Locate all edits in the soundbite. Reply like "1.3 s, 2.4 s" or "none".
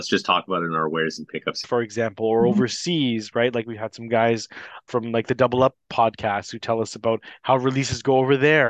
1.6 s